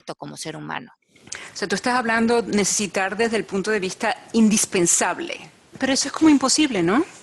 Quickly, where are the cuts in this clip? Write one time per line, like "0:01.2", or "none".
0:05.7